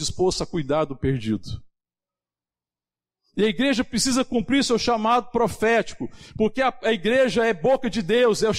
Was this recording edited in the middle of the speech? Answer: no; 0 cuts

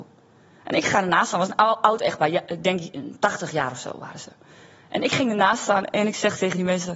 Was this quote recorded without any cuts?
yes; 0 cuts

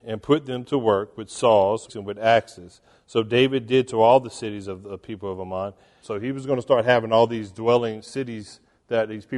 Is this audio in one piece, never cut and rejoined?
no; 2 cuts; at 1.9 s, 6.0 s

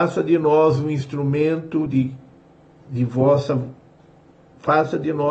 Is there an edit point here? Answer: no; 0 cuts

